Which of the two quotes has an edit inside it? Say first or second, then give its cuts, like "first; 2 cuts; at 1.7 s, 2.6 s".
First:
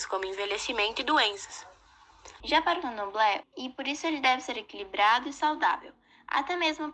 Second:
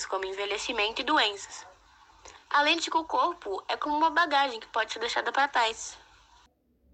first; 2 cuts; at 2.4 s, 3.4 s